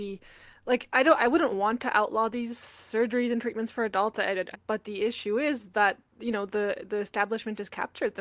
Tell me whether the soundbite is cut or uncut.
cut